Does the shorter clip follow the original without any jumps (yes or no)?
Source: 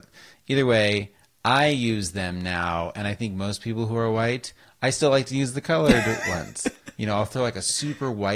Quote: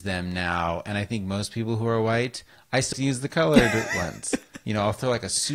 no